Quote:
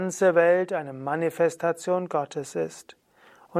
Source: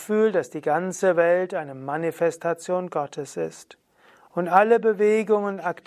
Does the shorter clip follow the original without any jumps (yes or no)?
yes